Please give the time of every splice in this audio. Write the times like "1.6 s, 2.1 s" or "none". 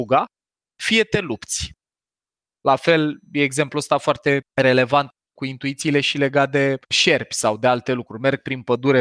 2.6 s, 4.5 s, 6.8 s